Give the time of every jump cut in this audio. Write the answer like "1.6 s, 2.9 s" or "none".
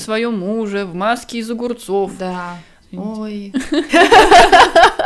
2.8 s, 3.9 s